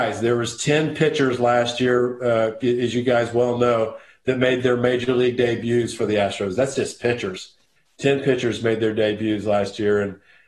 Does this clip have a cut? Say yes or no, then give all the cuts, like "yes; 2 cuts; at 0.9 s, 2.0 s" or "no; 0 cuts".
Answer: yes; 1 cut; at 2.6 s